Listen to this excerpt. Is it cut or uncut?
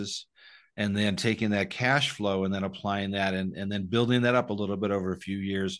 uncut